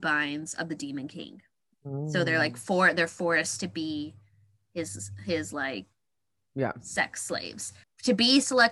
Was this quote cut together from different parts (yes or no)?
yes